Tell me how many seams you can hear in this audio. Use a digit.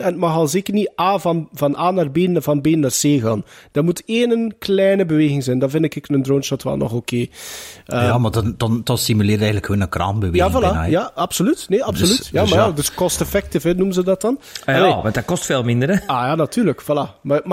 0